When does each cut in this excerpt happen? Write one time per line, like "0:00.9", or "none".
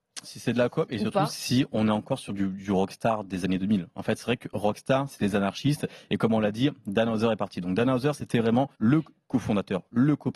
0:05.1
0:08.7